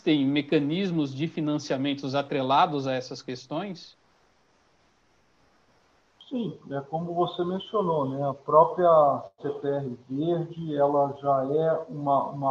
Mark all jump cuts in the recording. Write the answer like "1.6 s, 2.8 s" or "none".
none